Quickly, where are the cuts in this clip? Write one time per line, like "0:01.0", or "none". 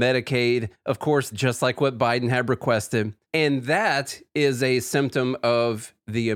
0:01.3
0:03.2